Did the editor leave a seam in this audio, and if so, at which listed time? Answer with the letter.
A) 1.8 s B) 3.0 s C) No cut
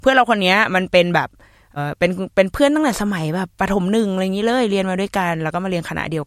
A